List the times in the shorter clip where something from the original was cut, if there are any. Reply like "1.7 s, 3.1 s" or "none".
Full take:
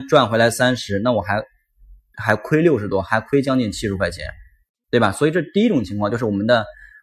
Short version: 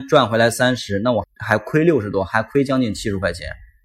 1.2 s

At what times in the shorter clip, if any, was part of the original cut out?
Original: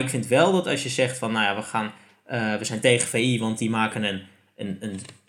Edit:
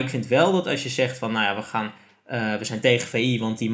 none

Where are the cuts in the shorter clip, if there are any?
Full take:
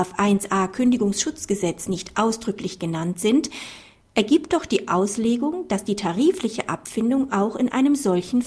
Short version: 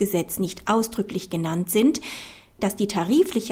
2.6 s

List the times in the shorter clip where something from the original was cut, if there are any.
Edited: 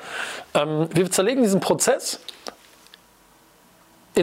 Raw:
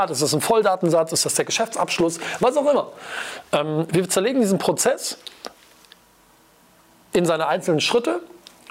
none

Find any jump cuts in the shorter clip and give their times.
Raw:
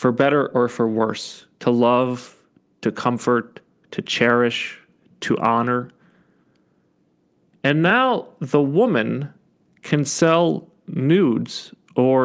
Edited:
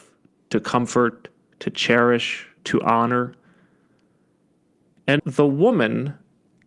2.6 s, 5.2 s

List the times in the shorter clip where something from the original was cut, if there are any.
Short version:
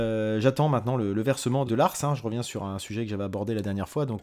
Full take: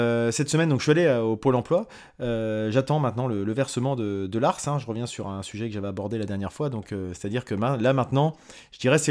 1.7 s

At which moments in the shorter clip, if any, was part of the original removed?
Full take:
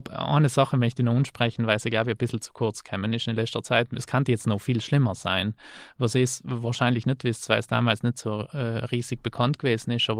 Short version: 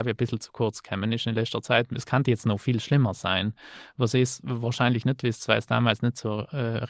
none

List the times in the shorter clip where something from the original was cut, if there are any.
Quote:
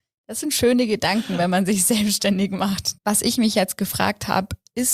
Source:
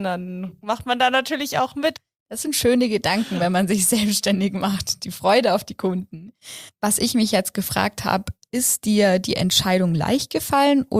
3.0 s

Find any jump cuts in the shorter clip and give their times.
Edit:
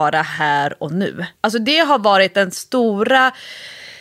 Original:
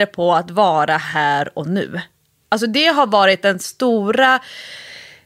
1.4 s

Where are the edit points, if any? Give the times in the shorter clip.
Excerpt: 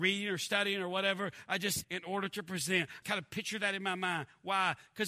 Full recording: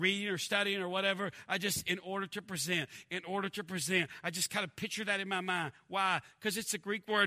1.8 s, 3.0 s

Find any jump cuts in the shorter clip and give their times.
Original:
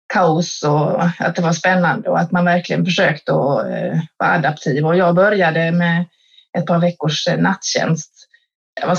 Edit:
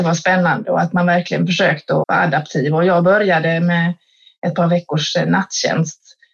2.0 s

